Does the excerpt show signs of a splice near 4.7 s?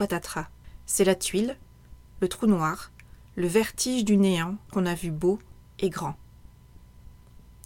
yes; 2 cuts; at 2.1 s, 4.7 s

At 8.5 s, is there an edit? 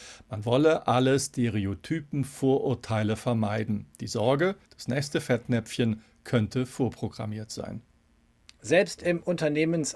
no; 1 cut; at 4.6 s

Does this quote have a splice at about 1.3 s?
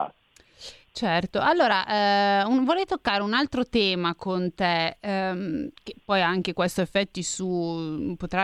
no; 0 cuts

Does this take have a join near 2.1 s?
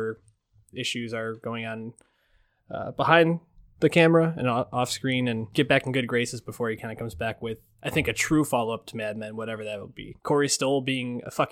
no; 1 cut; at 10.2 s

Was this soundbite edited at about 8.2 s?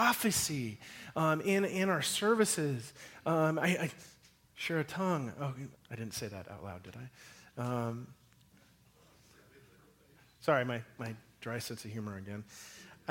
no; 1 cut; at 5.7 s

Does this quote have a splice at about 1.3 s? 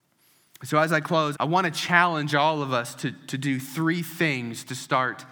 yes; 1 cut; at 1.3 s

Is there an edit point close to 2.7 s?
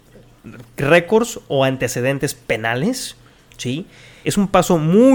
no; 1 cut; at 4.2 s

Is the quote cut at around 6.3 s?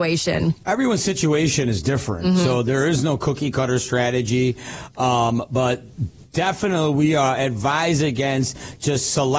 no; 0 cuts

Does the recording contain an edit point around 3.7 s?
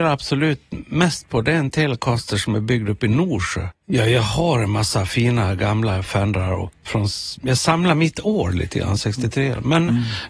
yes; 2 cuts; at 3.7 s, 6.8 s

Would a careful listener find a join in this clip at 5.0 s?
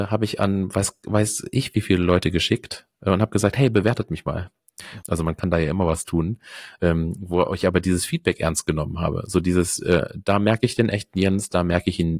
yes; 1 cut; at 5.0 s

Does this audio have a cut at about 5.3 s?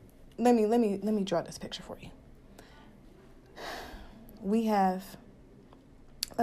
no; 0 cuts

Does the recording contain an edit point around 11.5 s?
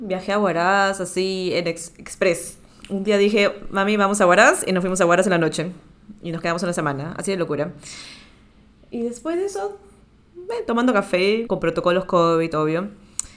yes; 1 cut; at 11.5 s

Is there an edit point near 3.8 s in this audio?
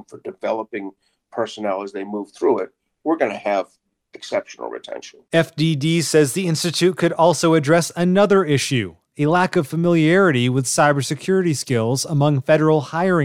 no; 0 cuts

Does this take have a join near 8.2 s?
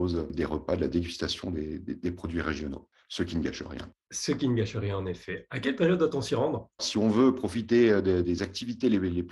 yes; 2 cuts; at 6.8 s, 8.2 s

